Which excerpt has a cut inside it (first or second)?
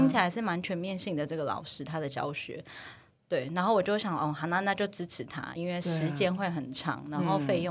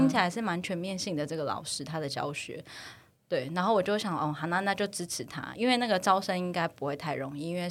first